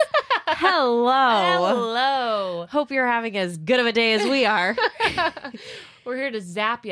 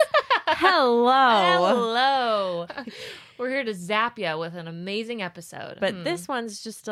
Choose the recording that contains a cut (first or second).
second